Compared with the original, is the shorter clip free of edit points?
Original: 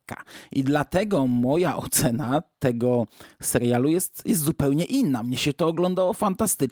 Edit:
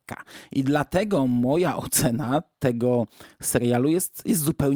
yes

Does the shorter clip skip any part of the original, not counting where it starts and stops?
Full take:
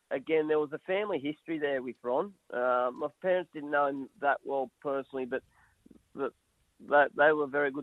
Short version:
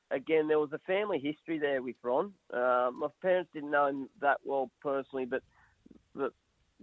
no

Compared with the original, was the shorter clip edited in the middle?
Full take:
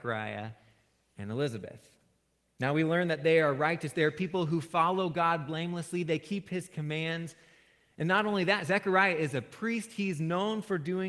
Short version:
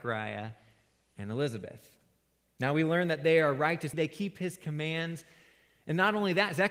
yes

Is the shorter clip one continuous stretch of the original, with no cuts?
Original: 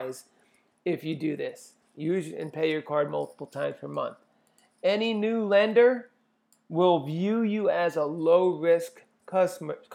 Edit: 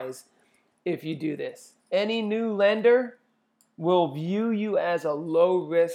no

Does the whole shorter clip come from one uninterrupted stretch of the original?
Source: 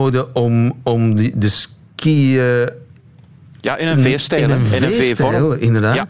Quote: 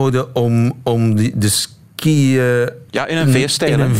no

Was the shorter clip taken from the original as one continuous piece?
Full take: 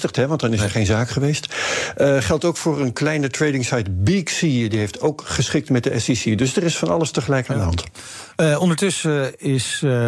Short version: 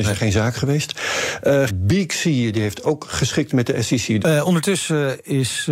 no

